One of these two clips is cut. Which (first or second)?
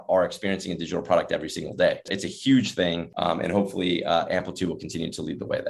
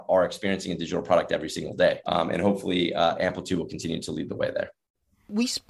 second